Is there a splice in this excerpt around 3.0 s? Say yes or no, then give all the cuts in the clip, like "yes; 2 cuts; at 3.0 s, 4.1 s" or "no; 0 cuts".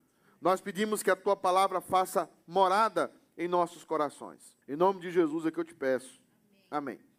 no; 1 cut; at 4.6 s